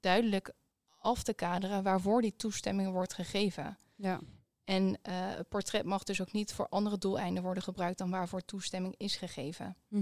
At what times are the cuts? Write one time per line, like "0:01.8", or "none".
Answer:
none

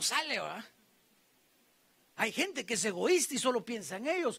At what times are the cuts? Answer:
none

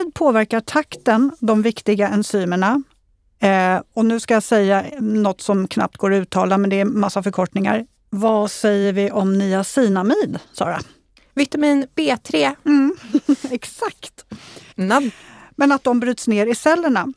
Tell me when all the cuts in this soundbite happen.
0:08.0
0:14.7

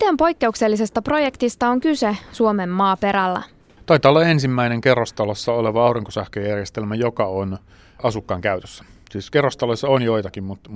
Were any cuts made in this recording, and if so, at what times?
none

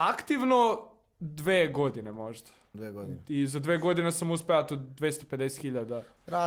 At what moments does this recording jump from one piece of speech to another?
none

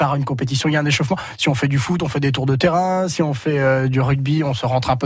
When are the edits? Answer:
none

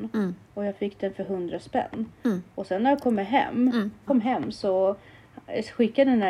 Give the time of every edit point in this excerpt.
0:04.1

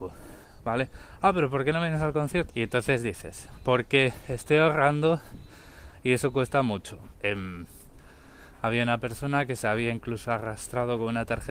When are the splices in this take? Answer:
0:02.5
0:07.1

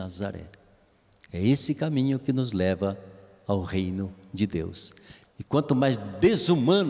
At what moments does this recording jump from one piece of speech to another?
0:05.2

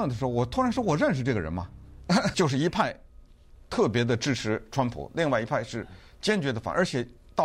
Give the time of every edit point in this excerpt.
0:02.3

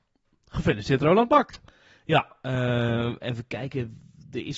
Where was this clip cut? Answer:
none

